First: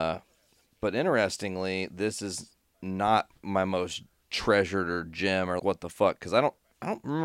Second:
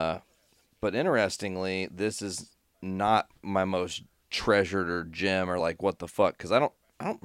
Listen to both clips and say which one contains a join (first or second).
first